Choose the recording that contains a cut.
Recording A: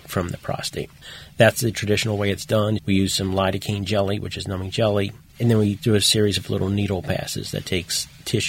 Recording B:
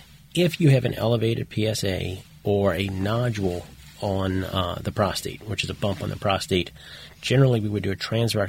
A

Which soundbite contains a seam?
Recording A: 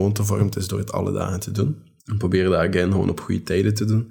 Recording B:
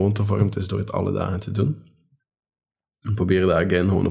A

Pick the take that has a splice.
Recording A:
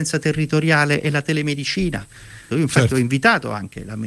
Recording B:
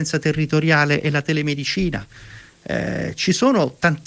A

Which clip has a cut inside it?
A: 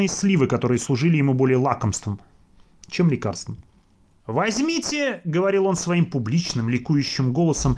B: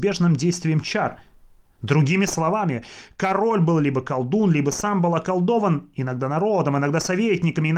A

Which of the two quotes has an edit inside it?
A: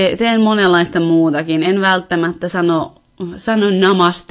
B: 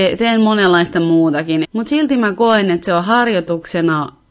B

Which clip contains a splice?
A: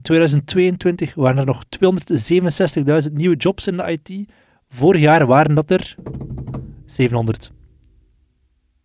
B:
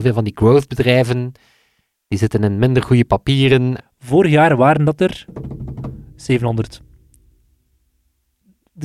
B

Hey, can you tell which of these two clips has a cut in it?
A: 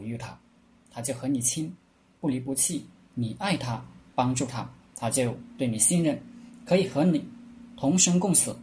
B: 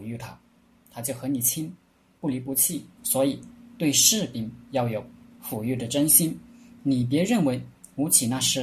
B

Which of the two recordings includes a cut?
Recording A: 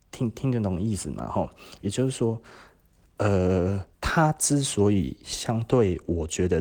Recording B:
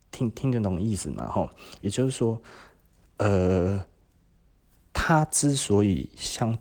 A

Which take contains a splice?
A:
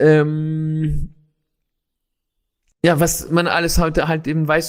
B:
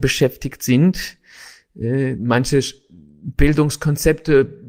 B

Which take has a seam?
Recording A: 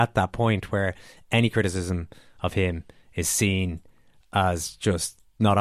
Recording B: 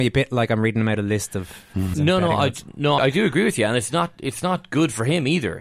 B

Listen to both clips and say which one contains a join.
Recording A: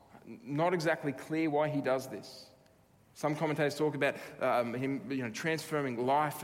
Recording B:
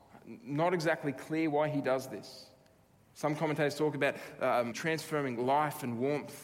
B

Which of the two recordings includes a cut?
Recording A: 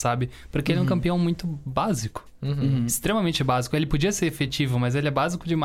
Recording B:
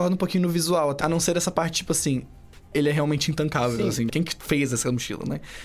B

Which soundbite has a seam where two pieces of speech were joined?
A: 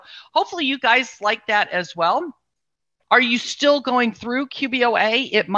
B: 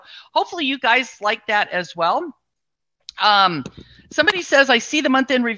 A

